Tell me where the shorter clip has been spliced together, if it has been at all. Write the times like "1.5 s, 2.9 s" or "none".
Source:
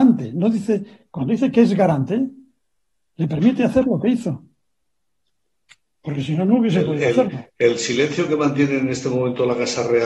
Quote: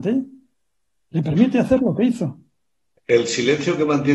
3.0 s